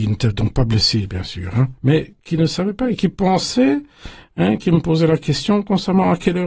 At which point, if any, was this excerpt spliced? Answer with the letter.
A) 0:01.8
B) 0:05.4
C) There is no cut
A